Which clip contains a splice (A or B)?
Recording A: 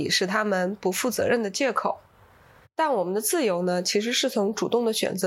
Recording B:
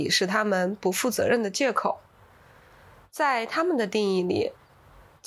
A